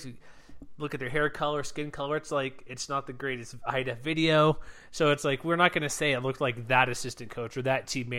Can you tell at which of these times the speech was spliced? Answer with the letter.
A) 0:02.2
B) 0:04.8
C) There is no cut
C